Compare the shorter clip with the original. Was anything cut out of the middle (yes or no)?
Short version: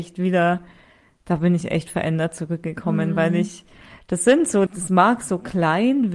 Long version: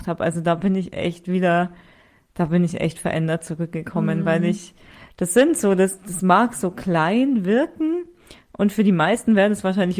yes